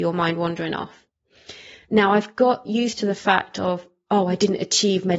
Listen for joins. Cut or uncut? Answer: cut